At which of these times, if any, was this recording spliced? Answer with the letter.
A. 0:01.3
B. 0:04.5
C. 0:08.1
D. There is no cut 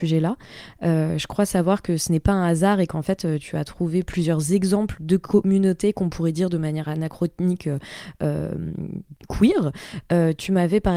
D